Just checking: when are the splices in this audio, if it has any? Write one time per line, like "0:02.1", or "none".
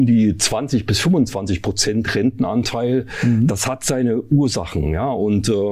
none